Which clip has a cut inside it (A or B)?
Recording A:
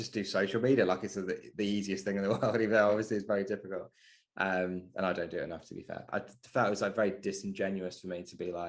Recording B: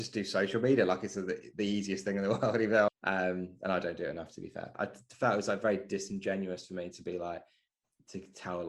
B